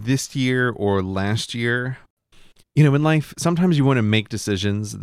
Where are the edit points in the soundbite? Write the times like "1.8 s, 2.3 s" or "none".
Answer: none